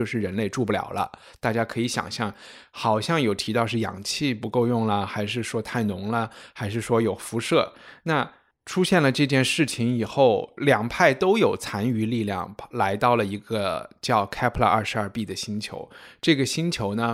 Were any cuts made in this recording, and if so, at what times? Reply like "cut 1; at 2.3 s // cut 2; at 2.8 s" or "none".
none

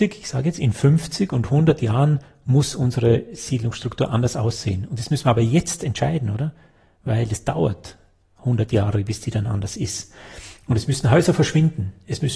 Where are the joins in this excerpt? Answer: none

